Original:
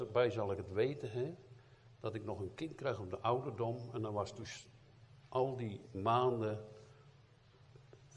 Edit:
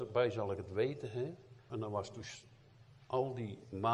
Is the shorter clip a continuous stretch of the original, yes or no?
no